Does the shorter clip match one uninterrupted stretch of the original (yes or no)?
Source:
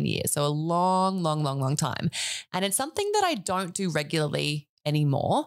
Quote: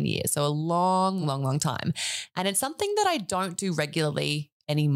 no